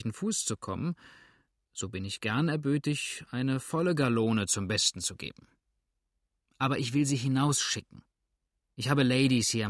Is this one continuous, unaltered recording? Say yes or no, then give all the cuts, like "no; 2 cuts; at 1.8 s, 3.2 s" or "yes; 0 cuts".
yes; 0 cuts